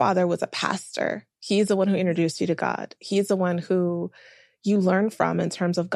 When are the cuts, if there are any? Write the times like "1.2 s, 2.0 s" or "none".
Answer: none